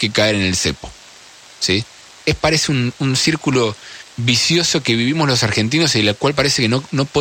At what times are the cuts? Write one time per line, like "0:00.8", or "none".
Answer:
none